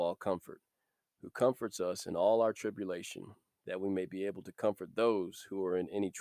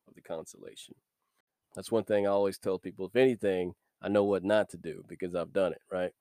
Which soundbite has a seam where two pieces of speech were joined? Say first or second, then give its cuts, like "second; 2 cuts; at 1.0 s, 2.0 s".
second; 1 cut; at 1.6 s